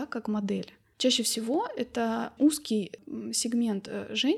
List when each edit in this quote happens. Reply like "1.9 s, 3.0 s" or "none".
2.4 s